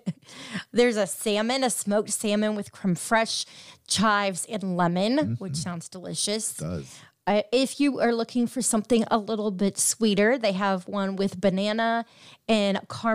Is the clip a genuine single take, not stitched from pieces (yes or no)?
yes